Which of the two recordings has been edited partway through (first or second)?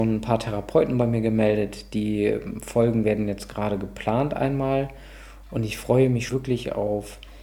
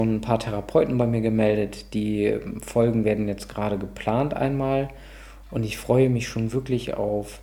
first